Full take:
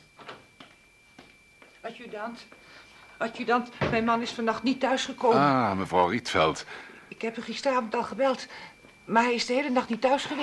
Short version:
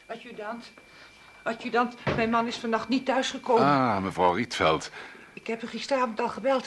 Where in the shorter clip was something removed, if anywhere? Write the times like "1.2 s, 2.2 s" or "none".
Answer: none